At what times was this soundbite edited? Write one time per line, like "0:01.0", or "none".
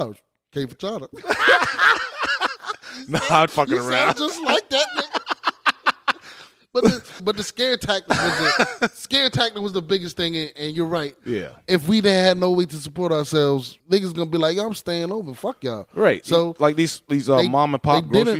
0:03.5
0:07.2
0:13.8